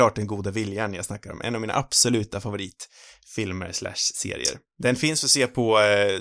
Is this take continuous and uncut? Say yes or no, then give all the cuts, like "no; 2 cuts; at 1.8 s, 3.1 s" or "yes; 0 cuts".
no; 1 cut; at 4.7 s